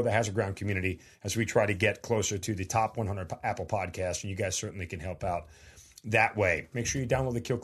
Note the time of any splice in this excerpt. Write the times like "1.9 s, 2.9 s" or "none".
6.7 s